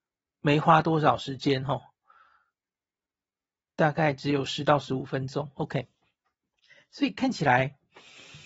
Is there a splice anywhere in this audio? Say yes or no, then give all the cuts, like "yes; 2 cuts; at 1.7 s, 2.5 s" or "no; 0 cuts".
no; 0 cuts